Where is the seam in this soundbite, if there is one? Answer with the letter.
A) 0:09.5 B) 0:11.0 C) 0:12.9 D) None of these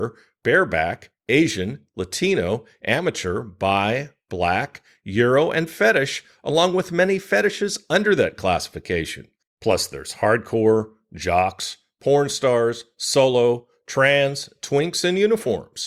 D